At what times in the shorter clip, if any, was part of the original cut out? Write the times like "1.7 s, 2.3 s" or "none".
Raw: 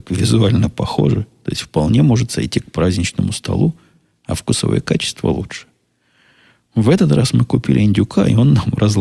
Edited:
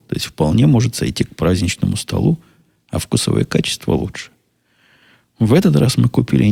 none